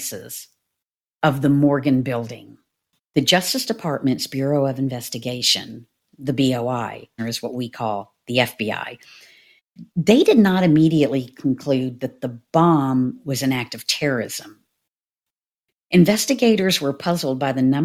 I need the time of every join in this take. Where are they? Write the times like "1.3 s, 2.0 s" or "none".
3.0 s, 7.2 s